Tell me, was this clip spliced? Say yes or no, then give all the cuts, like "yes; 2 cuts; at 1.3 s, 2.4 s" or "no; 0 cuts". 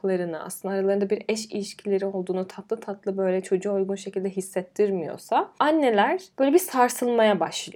no; 0 cuts